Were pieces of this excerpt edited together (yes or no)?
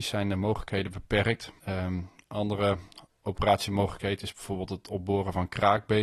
yes